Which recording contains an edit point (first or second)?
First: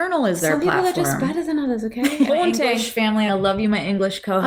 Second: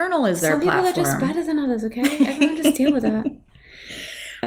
first